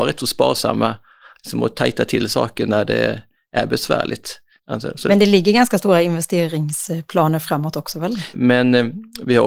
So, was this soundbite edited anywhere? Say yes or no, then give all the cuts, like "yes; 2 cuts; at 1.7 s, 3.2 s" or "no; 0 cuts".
yes; 2 cuts; at 4.6 s, 8.3 s